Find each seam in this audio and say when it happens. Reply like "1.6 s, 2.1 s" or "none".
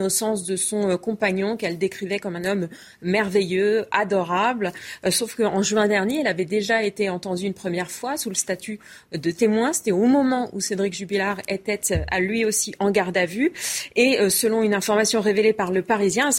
none